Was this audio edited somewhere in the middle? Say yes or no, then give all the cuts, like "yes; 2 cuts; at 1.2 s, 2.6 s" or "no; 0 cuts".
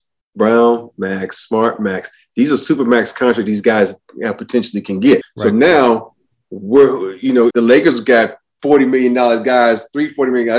yes; 2 cuts; at 5.2 s, 7.5 s